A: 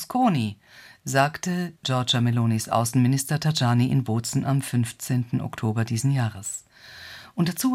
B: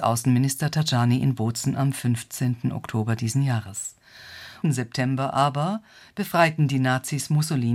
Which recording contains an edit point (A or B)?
B